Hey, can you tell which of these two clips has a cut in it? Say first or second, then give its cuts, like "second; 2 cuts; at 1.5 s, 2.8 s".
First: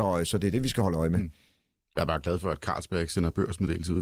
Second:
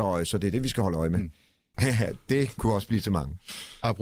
second; 1 cut; at 1.7 s